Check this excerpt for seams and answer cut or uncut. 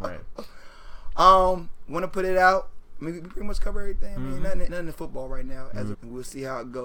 cut